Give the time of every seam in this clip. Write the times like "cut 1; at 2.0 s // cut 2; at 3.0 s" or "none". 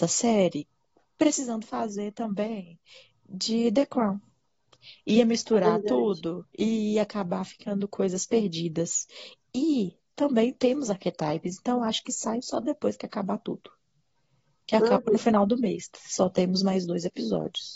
cut 1; at 6.5 s